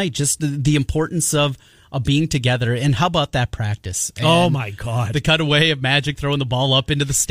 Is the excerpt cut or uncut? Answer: uncut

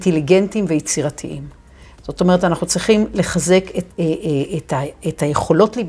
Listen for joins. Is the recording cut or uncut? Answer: cut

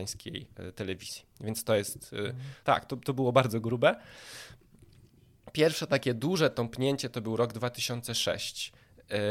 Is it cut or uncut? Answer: cut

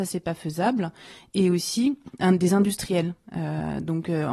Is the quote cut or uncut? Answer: uncut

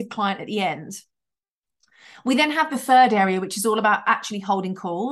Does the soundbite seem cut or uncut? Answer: uncut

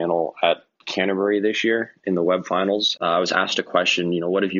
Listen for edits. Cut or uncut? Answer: cut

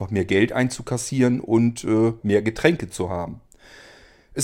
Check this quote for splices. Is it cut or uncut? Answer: cut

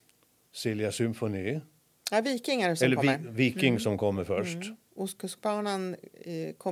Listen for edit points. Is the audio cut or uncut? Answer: cut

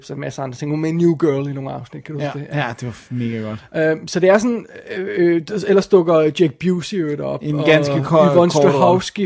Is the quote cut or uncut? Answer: uncut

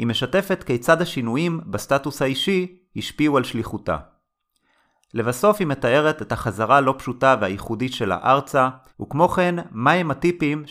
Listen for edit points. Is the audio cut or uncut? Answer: cut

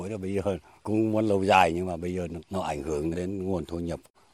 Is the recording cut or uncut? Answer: cut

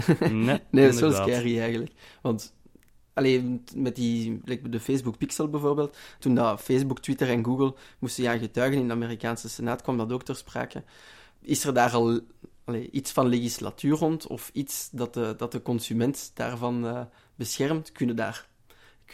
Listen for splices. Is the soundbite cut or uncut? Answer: cut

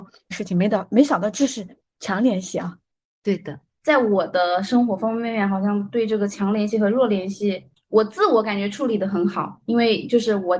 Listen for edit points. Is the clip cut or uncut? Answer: uncut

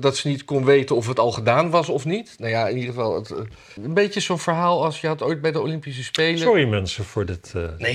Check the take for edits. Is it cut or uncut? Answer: cut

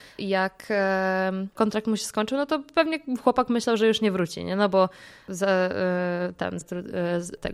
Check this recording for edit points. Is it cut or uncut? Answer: cut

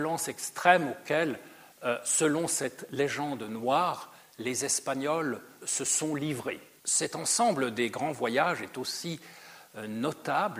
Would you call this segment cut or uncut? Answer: cut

